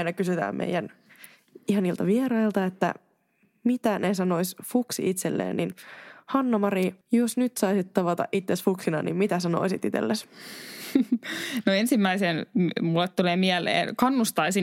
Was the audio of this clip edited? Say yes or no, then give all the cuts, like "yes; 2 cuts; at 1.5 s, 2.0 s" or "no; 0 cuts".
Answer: yes; 1 cut; at 7.0 s